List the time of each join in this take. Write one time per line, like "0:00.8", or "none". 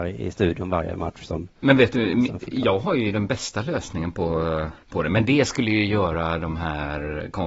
0:04.8